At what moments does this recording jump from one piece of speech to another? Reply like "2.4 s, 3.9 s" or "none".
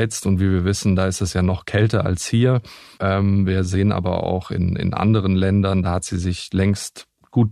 3.0 s